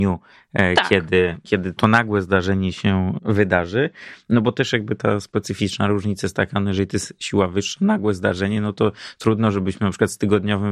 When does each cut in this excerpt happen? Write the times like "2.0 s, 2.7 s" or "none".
none